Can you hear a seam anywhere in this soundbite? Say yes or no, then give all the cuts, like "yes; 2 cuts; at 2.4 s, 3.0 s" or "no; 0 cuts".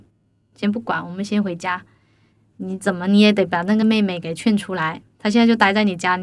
no; 0 cuts